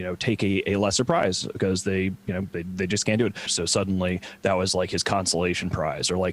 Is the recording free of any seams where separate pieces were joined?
no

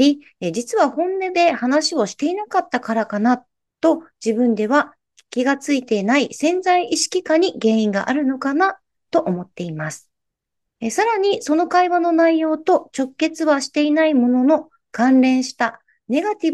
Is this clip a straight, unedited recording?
yes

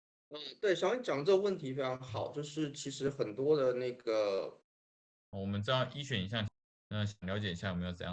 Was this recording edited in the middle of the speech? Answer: yes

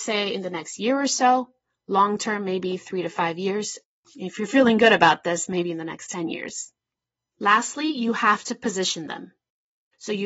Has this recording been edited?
no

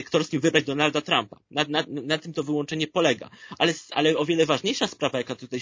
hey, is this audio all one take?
yes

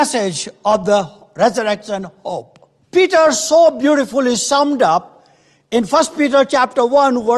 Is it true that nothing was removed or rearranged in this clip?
no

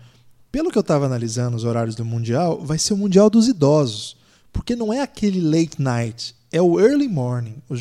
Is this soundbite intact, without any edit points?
yes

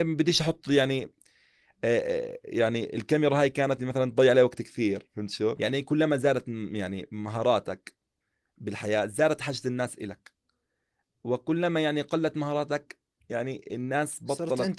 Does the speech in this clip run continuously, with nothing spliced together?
no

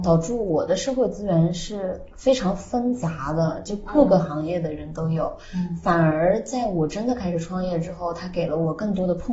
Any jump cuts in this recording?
no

